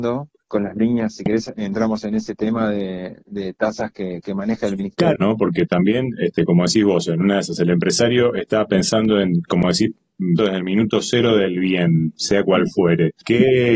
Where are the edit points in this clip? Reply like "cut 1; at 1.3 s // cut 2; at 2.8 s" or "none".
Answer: cut 1; at 5.2 s // cut 2; at 10.4 s